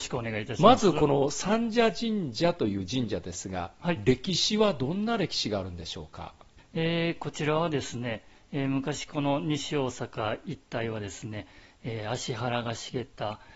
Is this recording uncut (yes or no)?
yes